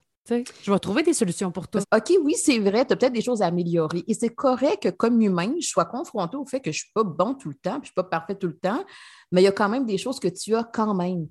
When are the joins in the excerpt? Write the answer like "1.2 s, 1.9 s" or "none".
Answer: 1.8 s

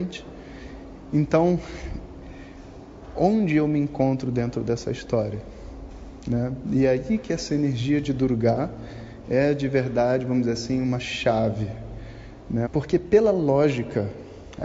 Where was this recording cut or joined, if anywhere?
12.7 s

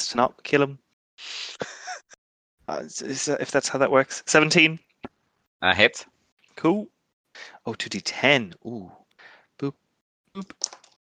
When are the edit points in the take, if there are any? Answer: none

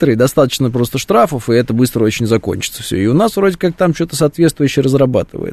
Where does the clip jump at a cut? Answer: none

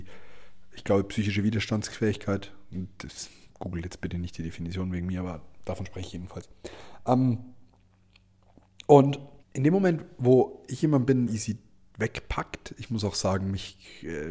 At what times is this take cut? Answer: 9.4 s, 11.3 s

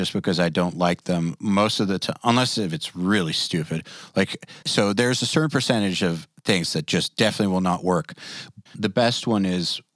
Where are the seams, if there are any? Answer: 4.6 s, 8.7 s

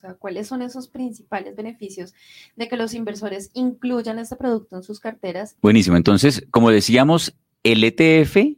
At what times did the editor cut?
5.6 s

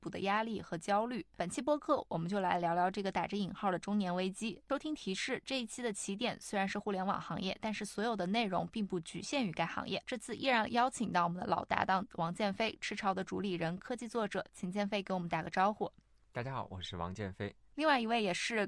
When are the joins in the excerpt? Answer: 10.0 s

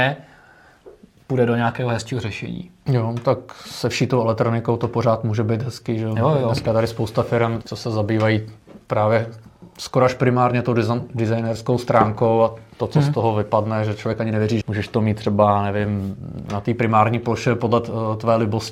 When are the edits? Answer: 7.6 s, 14.6 s, 16.5 s

